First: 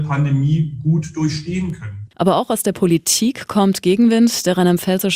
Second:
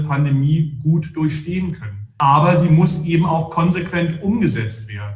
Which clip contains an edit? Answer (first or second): first